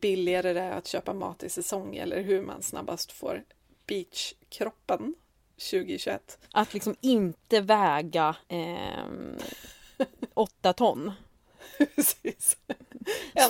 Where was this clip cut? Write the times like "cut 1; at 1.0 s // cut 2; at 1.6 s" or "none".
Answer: cut 1; at 6.4 s // cut 2; at 8.4 s // cut 3; at 10.3 s